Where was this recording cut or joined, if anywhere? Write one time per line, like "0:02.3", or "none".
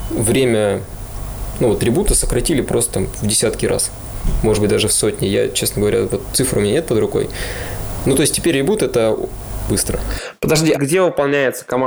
0:09.7
0:10.7